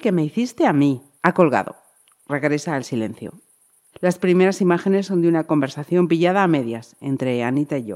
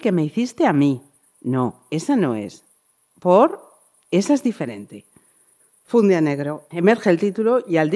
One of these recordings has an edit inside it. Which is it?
first; 2 cuts; at 1.2 s, 3.9 s

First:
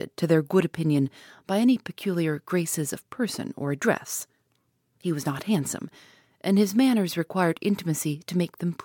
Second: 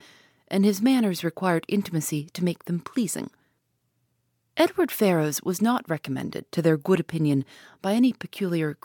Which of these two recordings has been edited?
second; 1 cut; at 4.4 s

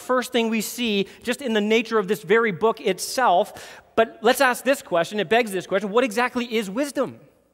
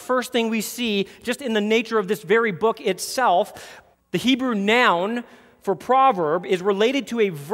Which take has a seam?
second; 1 cut; at 3.9 s

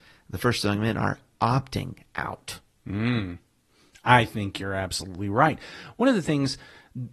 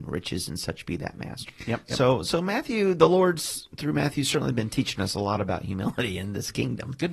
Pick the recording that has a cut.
second; 1 cut; at 1.5 s

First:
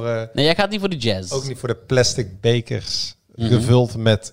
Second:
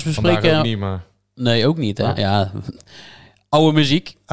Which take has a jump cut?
second; 1 cut; at 2.1 s

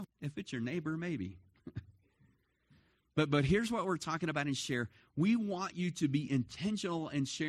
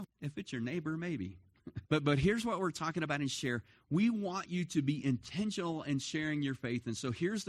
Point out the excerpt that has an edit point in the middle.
second; 1 cut; at 1.9 s

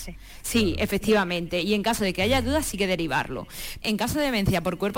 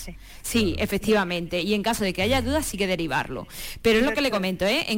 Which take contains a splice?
first; 1 cut; at 3.8 s

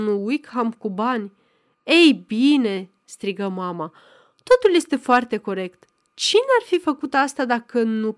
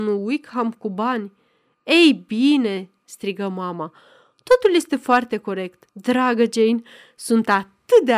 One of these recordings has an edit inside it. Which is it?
second; 1 cut; at 5.9 s

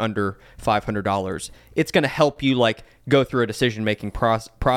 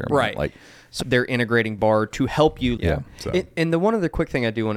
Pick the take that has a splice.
second; 2 cuts; at 1.0 s, 2.8 s

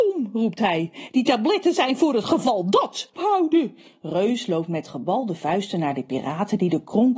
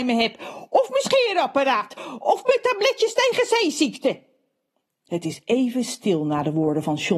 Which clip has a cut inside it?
first; 2 cuts; at 1.1 s, 3.2 s

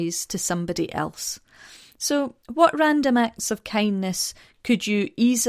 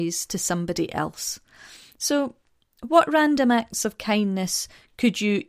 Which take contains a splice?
first; 1 cut; at 2.4 s

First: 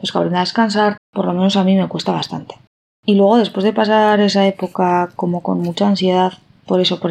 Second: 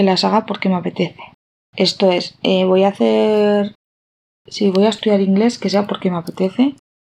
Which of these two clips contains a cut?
first; 1 cut; at 1.0 s

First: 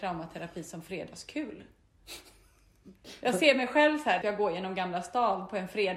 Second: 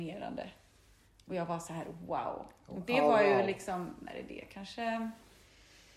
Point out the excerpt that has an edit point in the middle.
first; 1 cut; at 4.2 s

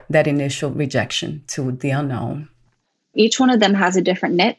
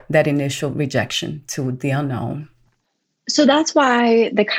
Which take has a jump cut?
first; 1 cut; at 3.1 s

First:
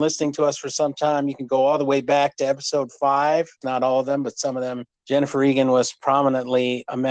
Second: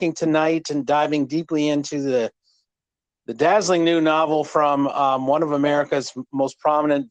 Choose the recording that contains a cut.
first; 2 cuts; at 3.6 s, 4.9 s

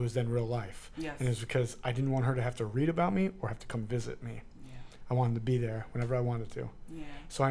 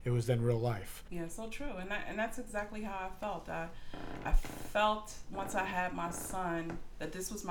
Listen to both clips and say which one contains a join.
second; 1 cut; at 1.1 s

